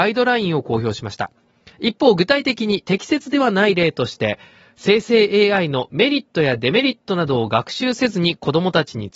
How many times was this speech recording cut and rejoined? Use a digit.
1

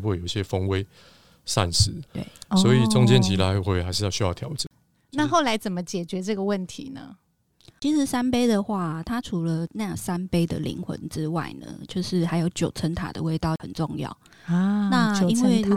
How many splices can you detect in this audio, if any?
1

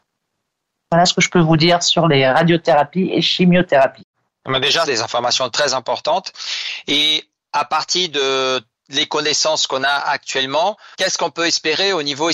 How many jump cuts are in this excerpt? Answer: 2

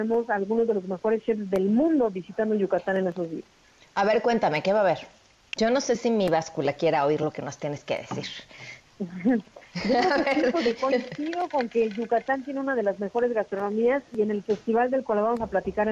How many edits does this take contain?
1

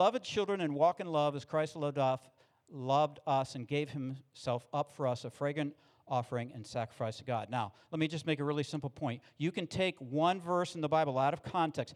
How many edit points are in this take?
0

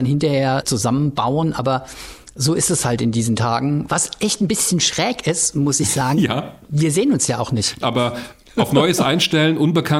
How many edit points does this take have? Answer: 2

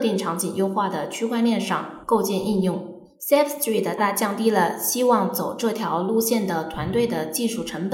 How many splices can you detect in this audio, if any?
1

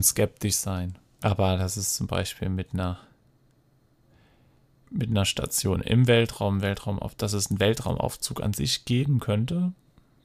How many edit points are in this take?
1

